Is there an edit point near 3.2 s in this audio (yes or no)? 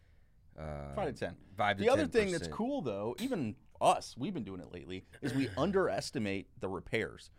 yes